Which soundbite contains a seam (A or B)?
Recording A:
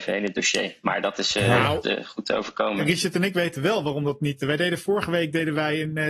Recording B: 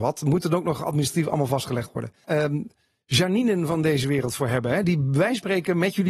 B